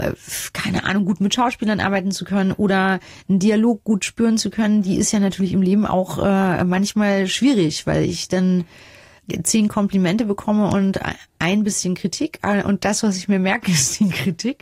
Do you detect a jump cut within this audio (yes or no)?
no